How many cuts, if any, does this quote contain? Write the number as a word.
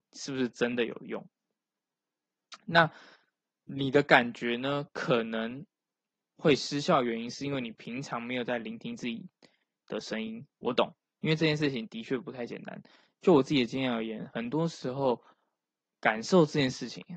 zero